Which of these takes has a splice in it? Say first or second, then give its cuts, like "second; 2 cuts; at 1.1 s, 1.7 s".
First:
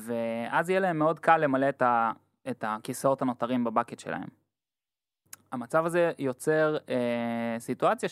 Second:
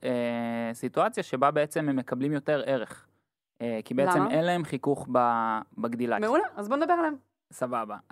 second; 1 cut; at 6.2 s